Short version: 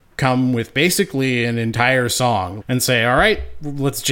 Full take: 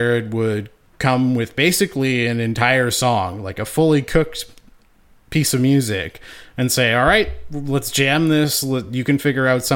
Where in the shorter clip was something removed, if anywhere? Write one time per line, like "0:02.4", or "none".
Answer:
0:02.6